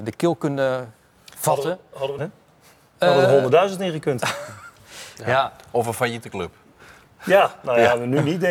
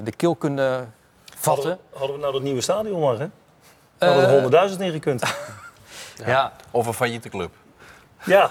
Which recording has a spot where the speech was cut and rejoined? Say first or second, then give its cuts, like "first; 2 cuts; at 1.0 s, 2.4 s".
first; 1 cut; at 2.2 s